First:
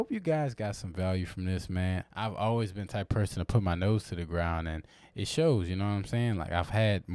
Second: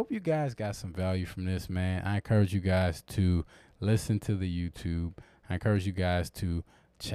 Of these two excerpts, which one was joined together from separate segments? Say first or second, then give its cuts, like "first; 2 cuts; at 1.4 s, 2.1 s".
first; 1 cut; at 2.0 s